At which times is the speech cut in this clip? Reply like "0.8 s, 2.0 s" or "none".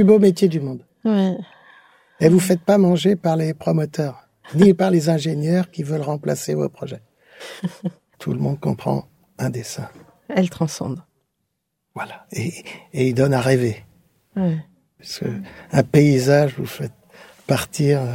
8.1 s